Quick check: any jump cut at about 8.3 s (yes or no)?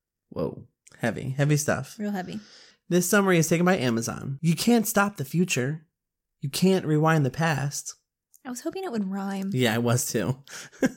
yes